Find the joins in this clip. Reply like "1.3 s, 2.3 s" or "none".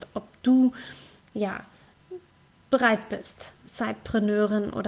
none